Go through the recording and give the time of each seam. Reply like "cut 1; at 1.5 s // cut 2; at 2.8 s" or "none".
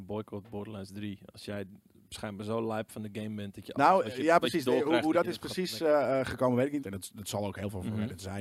cut 1; at 6.8 s